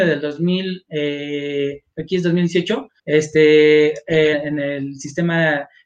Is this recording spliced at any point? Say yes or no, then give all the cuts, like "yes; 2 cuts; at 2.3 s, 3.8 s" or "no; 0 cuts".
yes; 2 cuts; at 3.0 s, 4.3 s